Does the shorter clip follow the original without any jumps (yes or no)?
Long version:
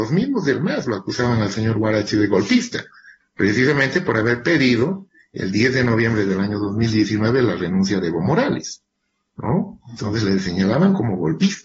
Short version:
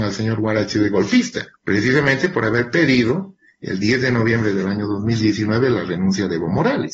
no